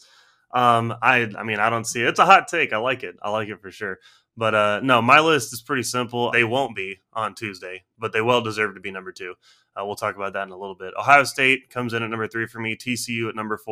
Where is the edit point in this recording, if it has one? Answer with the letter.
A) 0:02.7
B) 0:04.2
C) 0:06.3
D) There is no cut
C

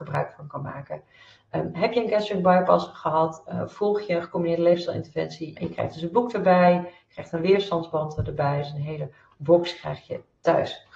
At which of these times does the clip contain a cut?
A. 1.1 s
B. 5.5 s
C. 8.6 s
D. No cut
B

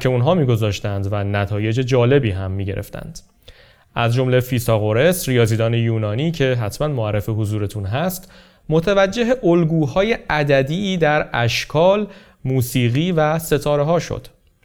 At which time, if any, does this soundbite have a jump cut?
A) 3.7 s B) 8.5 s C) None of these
C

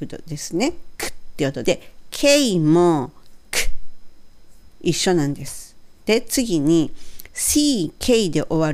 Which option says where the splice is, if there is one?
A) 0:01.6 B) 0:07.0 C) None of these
A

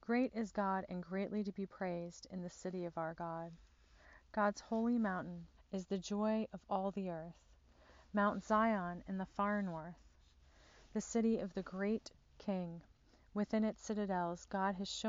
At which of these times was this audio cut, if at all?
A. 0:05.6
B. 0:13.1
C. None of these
A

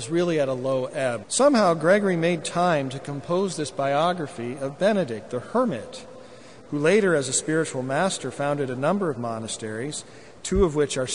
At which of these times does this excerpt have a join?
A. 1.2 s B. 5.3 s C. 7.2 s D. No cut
A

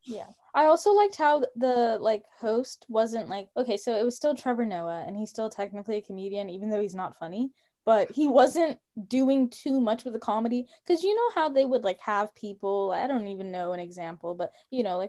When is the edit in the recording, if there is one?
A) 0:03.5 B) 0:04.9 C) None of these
A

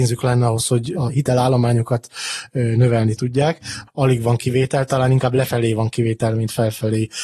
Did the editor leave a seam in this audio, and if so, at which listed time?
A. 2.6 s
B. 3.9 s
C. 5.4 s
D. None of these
B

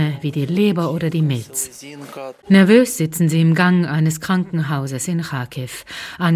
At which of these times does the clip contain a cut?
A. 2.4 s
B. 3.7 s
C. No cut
A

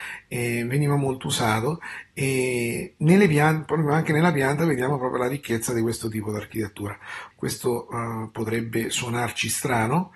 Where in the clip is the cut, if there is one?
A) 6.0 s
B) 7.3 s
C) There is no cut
B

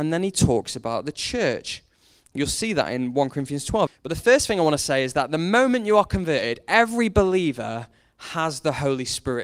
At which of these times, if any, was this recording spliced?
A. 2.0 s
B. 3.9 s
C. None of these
B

